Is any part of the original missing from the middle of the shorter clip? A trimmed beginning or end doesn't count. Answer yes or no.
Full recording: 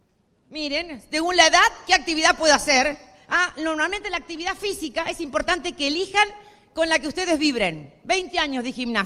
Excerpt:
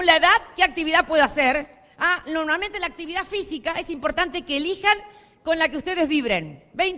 no